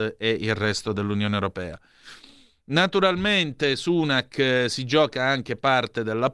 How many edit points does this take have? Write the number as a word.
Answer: zero